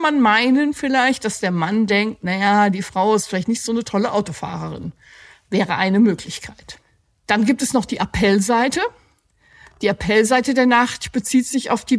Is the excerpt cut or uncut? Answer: uncut